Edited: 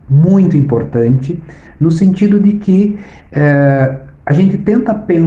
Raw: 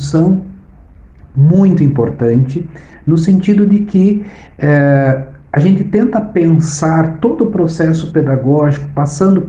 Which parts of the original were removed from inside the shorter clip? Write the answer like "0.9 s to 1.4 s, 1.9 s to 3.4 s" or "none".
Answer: none